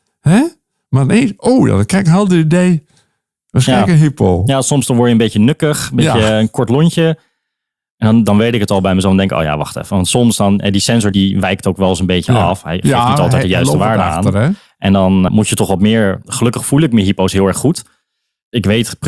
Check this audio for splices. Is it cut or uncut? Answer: cut